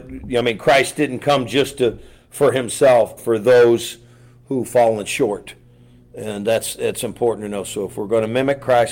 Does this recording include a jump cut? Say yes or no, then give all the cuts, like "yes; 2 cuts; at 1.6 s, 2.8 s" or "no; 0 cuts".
yes; 1 cut; at 3.2 s